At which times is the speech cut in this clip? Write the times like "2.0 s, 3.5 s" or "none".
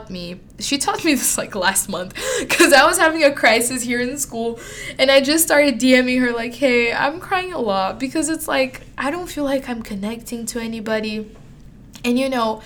none